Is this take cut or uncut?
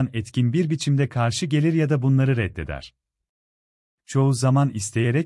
uncut